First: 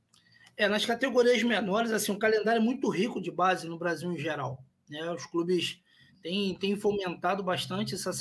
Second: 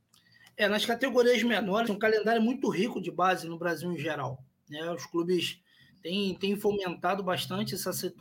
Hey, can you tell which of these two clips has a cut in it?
second; 1 cut; at 1.9 s

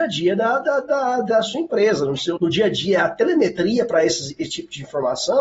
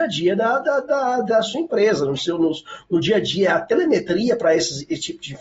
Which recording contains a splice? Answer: first; 1 cut; at 2.4 s

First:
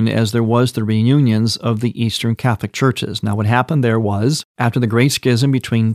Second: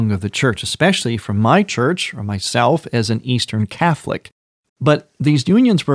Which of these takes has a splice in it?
second; 1 cut; at 4.7 s

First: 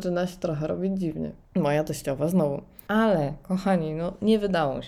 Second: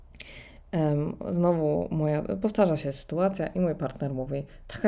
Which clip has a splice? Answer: first; 2 cuts; at 1.5 s, 2.9 s

